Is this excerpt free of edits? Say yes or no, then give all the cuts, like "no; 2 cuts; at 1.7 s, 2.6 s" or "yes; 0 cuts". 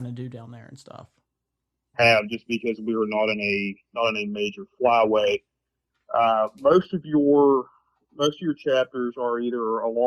no; 1 cut; at 1.9 s